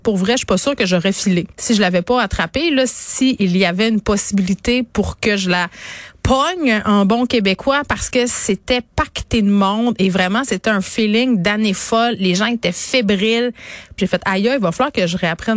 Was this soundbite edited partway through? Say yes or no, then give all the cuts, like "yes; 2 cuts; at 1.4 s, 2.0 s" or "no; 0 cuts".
yes; 2 cuts; at 1.5 s, 14.0 s